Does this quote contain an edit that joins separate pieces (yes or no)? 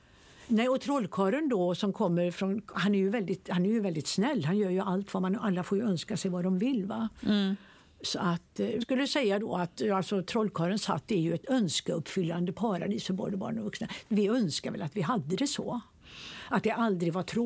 yes